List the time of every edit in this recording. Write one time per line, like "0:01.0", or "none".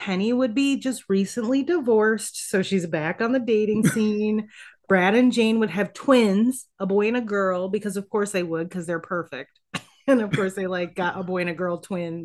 none